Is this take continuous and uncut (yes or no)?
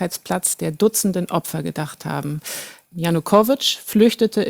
no